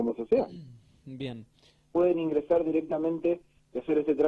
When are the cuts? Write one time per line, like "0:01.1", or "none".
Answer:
0:01.9